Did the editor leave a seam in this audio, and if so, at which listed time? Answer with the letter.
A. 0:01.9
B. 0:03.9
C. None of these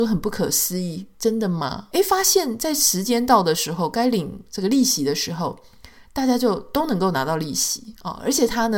A